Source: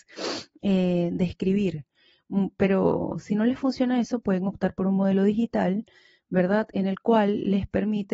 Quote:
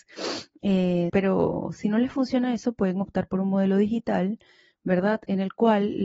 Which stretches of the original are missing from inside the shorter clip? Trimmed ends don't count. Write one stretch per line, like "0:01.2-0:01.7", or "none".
0:01.1-0:02.6